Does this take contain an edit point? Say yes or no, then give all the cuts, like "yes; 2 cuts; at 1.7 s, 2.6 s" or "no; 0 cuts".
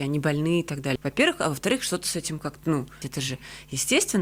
yes; 2 cuts; at 1.0 s, 3.0 s